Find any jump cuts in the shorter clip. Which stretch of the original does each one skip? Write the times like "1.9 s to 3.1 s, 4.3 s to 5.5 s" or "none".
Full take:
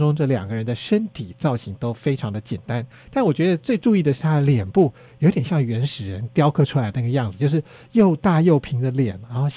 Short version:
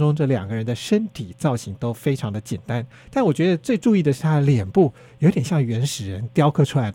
none